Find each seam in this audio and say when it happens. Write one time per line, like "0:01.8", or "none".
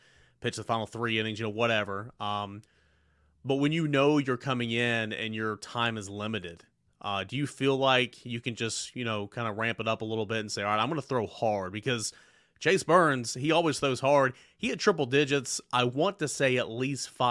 none